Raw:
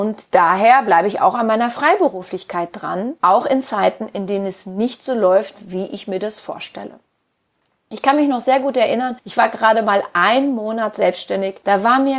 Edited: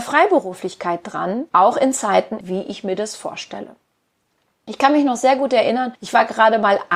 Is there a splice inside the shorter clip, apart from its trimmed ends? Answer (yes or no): yes